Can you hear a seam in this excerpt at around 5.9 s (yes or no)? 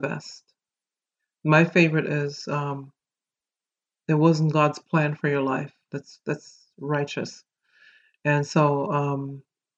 yes